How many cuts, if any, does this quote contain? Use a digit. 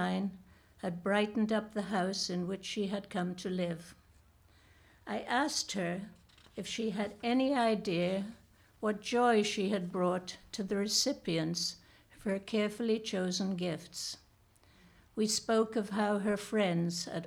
0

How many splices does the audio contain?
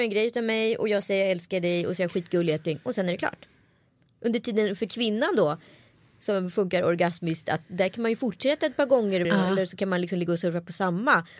1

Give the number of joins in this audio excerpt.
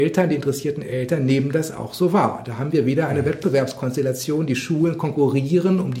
0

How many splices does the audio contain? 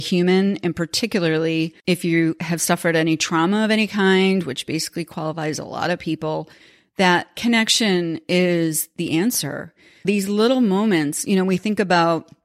2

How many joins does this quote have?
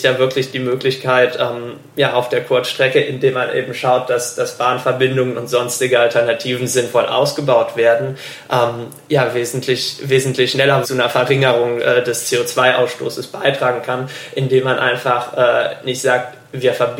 1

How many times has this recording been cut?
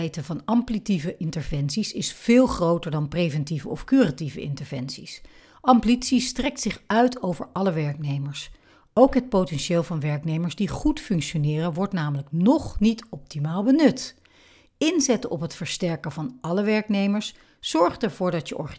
0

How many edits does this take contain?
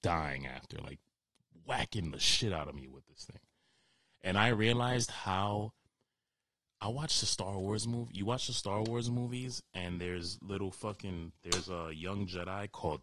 0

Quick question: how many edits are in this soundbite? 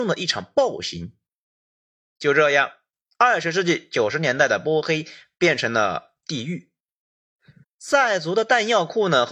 1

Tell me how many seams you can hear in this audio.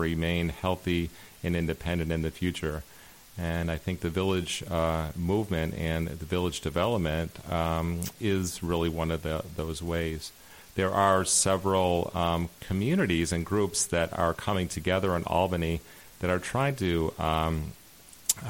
0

